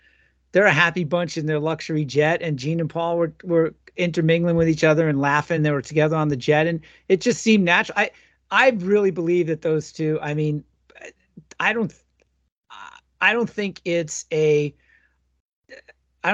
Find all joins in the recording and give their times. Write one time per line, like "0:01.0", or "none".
none